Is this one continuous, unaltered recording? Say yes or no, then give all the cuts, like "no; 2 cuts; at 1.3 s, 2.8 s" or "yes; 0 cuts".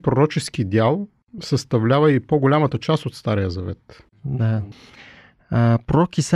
yes; 0 cuts